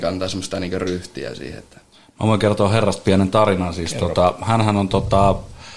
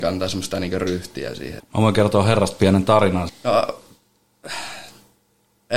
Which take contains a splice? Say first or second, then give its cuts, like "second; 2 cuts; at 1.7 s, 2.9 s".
second; 2 cuts; at 1.6 s, 3.3 s